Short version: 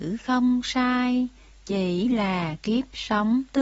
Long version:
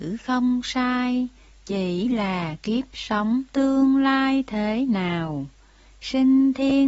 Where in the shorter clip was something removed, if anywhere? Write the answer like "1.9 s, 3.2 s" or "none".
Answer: none